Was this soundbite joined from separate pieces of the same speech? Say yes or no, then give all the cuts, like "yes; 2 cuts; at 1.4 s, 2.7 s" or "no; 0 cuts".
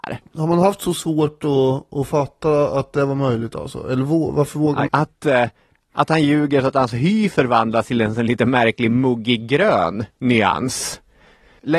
yes; 1 cut; at 4.9 s